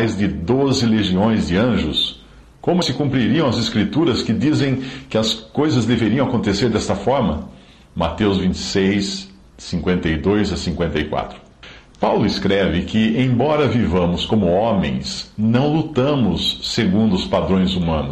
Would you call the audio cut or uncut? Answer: cut